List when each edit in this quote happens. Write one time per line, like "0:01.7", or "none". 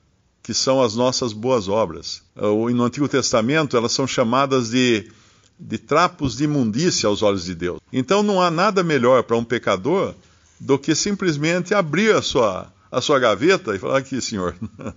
0:02.3
0:07.8